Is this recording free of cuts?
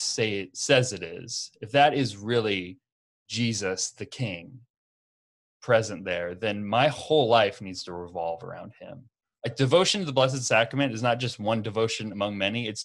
yes; 0 cuts

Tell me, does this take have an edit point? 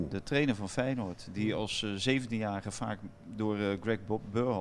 no; 0 cuts

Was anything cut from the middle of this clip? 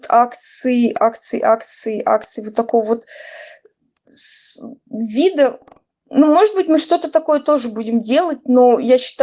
no; 0 cuts

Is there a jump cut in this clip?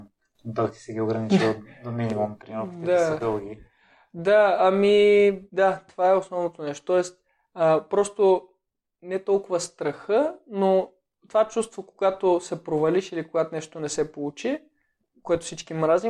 yes; 1 cut; at 5.5 s

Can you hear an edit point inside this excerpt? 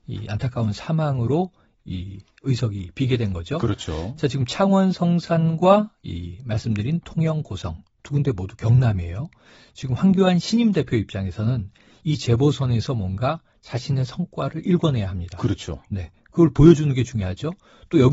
no; 0 cuts

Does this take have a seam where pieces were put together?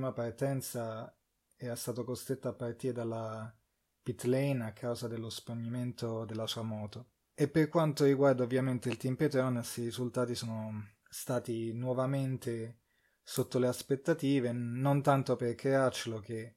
no; 0 cuts

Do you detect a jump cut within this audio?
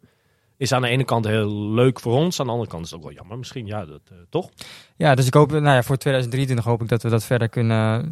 no; 0 cuts

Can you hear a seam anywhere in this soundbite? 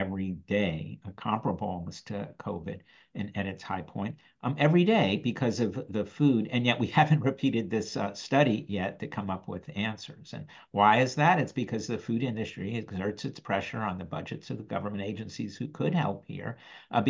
no; 0 cuts

